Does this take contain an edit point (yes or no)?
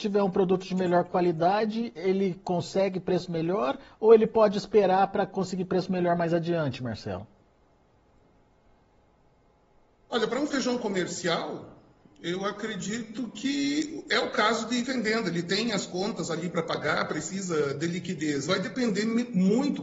no